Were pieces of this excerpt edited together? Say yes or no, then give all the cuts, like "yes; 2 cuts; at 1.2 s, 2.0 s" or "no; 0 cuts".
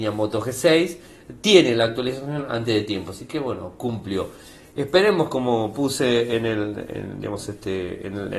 no; 0 cuts